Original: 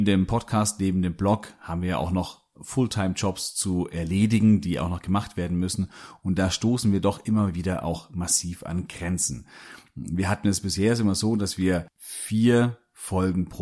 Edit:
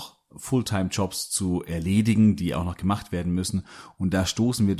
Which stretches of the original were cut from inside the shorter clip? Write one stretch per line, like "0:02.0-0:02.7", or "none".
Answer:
none